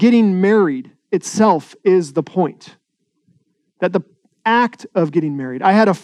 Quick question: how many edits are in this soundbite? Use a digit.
0